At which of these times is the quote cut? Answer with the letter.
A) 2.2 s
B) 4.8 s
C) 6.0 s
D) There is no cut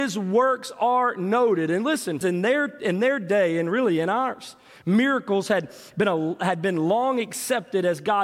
A